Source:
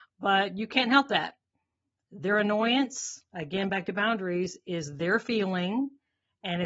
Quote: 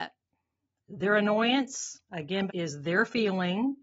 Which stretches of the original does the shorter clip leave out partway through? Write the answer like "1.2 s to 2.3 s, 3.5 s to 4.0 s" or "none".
3.7 s to 4.6 s